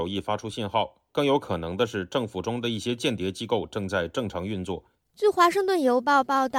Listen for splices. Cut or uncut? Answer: cut